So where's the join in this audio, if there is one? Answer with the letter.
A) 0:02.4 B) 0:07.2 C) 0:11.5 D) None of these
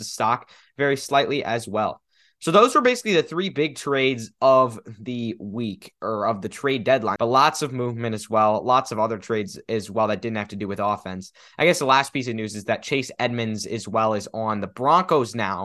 B